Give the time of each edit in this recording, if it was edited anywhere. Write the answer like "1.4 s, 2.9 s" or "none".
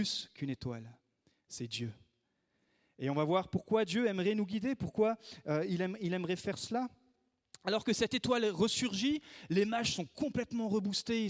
none